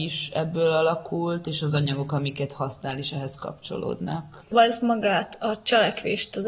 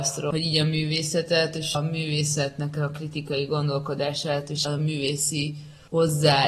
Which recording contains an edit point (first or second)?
second